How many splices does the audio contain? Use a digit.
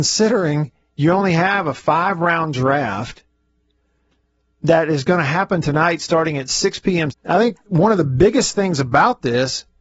1